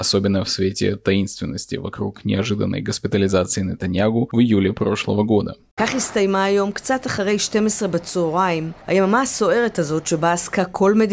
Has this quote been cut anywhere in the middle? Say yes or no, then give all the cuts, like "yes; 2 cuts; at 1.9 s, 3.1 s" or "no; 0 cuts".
yes; 1 cut; at 8.8 s